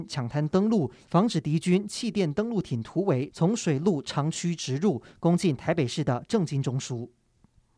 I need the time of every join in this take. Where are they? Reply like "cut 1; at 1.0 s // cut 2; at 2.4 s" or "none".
cut 1; at 1.0 s